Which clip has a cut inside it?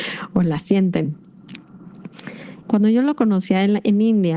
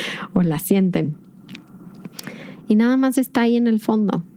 first; 1 cut; at 2.6 s

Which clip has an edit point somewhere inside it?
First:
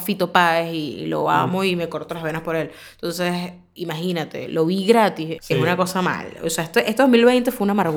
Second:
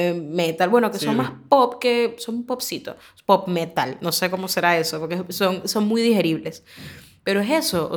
first; 1 cut; at 5.4 s

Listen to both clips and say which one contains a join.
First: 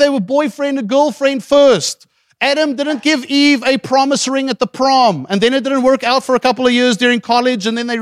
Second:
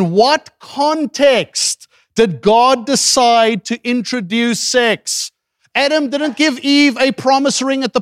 second; 1 cut; at 5.6 s

